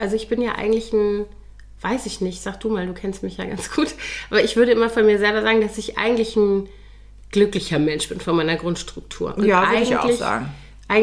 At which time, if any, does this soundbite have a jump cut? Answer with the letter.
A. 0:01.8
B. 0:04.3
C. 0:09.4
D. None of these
D